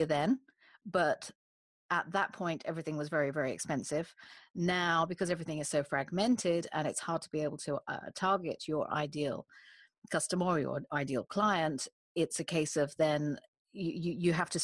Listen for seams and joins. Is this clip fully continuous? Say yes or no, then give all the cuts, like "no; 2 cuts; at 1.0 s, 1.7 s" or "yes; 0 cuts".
yes; 0 cuts